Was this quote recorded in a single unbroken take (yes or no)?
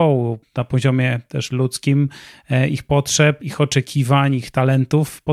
no